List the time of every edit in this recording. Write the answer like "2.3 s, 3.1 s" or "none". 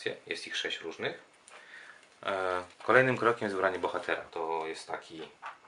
2.7 s, 4.3 s